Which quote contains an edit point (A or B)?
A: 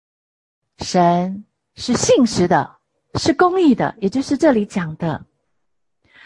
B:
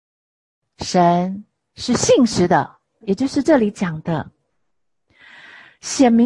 B